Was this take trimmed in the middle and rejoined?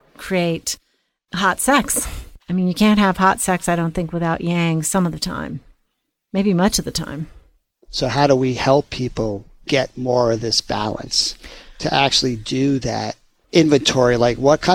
no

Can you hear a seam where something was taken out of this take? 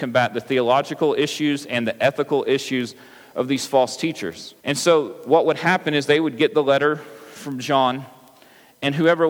yes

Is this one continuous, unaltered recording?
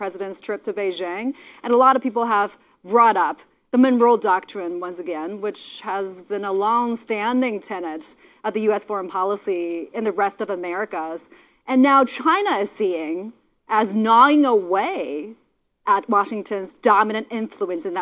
yes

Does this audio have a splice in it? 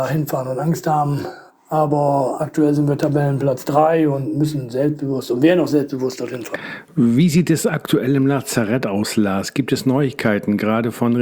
yes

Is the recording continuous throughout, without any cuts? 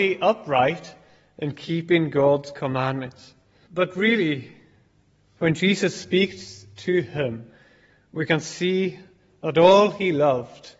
no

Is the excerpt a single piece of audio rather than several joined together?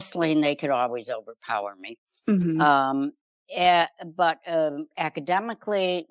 yes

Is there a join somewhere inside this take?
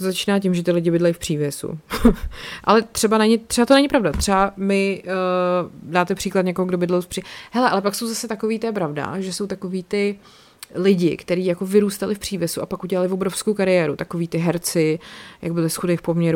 no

